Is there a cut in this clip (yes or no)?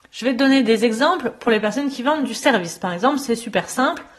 no